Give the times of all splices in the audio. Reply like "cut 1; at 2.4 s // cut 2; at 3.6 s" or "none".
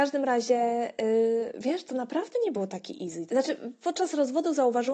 cut 1; at 3.3 s